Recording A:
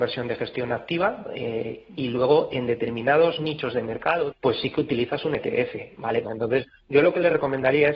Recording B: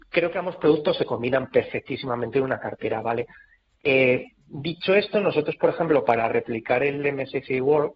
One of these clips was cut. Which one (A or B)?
A